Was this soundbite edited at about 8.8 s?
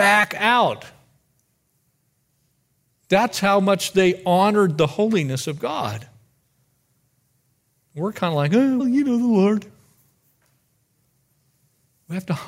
yes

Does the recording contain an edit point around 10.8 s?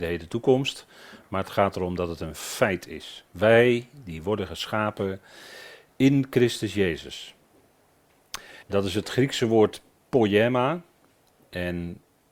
no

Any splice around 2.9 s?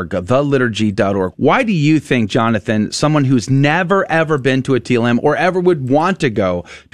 no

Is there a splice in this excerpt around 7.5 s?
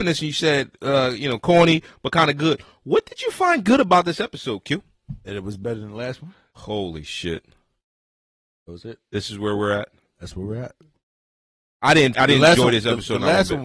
no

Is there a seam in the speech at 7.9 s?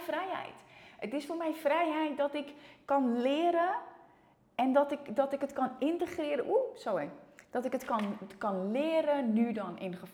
no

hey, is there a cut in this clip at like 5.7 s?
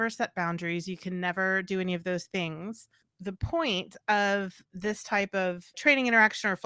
yes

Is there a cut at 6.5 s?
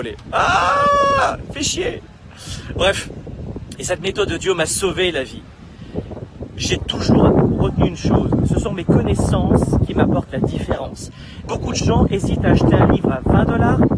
no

